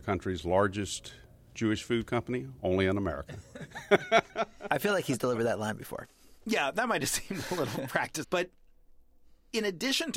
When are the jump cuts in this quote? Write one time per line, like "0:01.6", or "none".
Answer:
0:06.4
0:08.2